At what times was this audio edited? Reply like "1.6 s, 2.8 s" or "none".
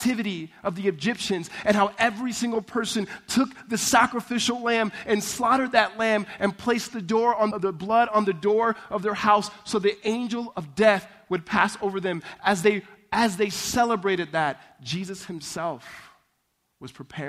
7.5 s